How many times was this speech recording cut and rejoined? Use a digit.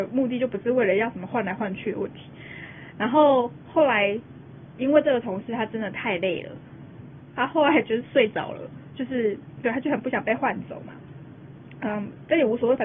1